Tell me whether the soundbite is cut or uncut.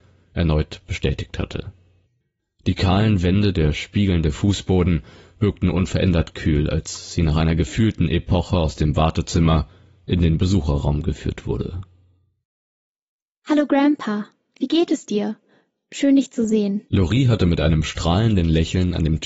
uncut